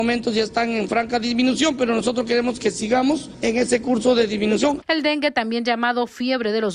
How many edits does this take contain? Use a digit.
1